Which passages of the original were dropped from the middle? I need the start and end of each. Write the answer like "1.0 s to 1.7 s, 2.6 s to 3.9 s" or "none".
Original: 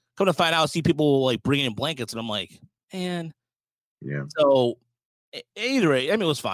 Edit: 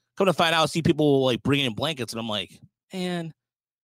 none